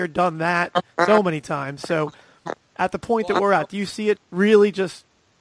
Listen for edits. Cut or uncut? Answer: cut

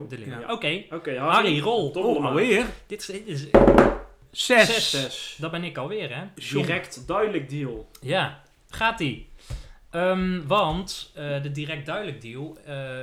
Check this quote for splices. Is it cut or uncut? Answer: uncut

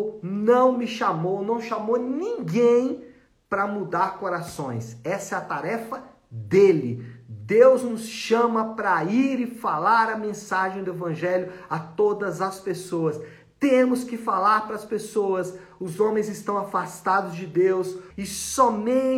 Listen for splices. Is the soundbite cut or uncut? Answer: cut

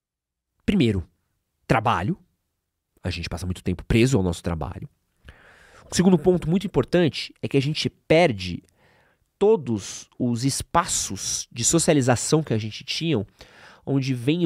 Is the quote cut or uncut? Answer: uncut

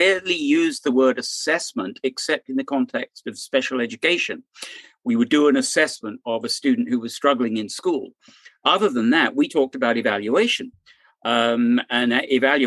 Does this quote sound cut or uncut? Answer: uncut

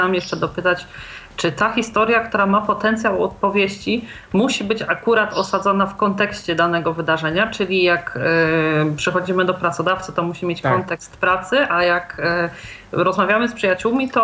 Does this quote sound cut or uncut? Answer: uncut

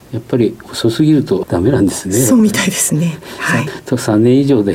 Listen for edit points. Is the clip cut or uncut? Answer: uncut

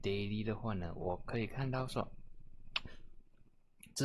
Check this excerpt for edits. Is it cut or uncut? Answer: uncut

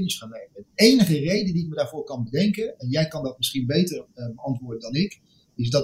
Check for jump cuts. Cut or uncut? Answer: uncut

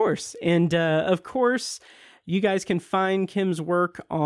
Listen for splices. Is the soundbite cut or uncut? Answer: uncut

